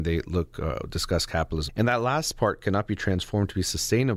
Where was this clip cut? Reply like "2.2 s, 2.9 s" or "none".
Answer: 1.7 s